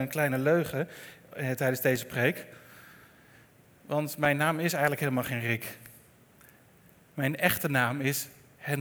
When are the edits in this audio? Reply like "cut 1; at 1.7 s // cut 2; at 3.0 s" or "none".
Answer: none